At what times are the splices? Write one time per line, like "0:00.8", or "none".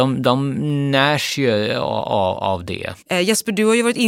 0:03.0